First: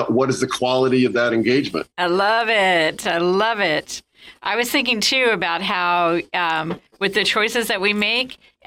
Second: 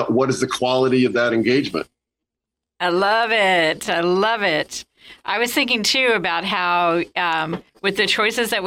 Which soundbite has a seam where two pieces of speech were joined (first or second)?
first